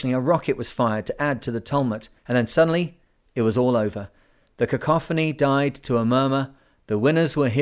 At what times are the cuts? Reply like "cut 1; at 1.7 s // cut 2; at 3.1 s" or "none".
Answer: cut 1; at 2.2 s